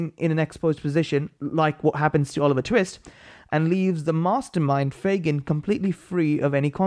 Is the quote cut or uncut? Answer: uncut